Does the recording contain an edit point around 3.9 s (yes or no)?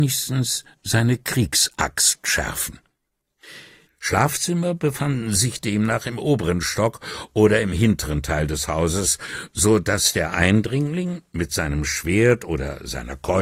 yes